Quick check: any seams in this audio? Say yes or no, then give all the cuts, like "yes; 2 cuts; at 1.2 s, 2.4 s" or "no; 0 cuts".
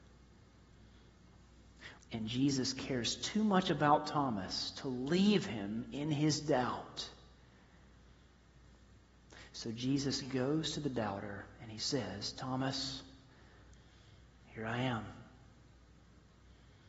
yes; 1 cut; at 2.0 s